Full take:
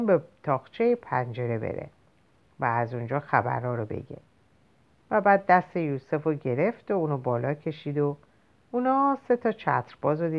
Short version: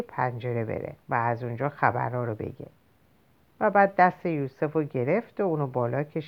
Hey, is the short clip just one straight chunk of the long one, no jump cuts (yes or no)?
no